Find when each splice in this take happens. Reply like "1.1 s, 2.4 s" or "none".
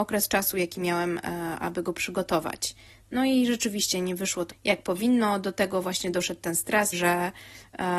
4.5 s, 6.9 s